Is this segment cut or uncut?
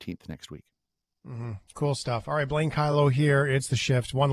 uncut